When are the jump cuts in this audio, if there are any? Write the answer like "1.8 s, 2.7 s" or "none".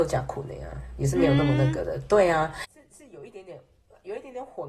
2.6 s